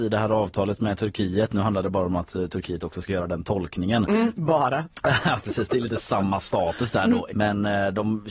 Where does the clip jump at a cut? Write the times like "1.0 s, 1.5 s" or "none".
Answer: 4.3 s, 7.3 s